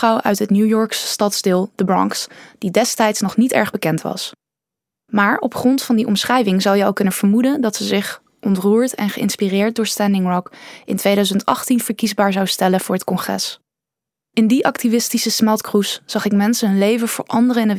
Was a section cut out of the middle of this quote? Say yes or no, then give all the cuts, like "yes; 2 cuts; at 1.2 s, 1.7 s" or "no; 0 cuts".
yes; 1 cut; at 14.1 s